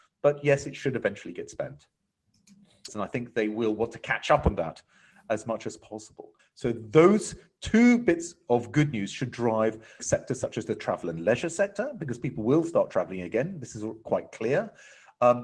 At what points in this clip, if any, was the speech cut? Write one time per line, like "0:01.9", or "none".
0:02.9
0:06.4
0:10.0